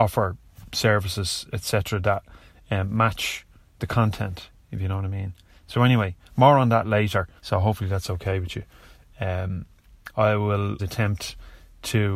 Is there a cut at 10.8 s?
yes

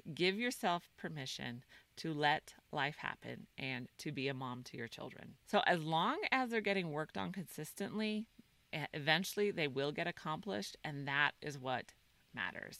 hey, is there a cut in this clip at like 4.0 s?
no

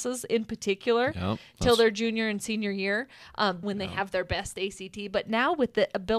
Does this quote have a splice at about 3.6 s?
yes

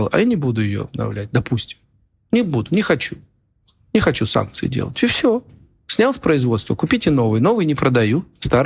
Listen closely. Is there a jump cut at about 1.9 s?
no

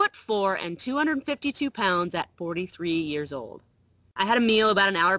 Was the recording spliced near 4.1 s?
no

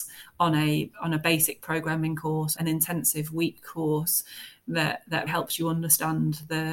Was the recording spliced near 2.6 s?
yes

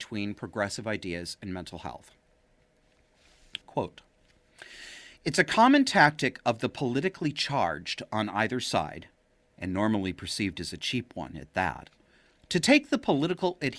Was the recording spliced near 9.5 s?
no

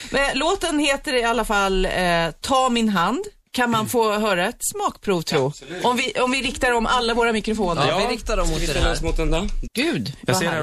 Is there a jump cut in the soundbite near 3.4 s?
yes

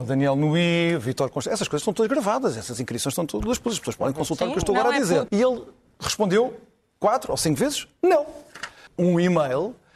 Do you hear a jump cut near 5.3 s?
yes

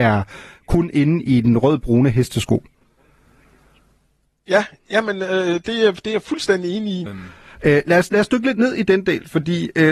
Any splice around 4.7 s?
no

